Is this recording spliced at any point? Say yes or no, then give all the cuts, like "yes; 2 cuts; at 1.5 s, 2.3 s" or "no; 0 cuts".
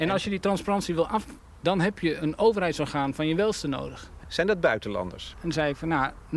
yes; 3 cuts; at 1.6 s, 4.2 s, 5.3 s